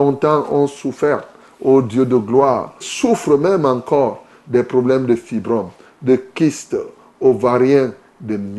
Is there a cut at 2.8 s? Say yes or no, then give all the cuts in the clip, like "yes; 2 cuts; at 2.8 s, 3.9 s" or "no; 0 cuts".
yes; 1 cut; at 2.8 s